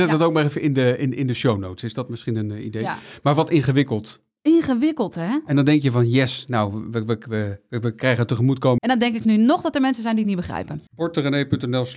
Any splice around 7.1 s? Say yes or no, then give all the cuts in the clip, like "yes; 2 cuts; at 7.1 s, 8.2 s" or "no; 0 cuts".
no; 2 cuts; at 8.8 s, 10.9 s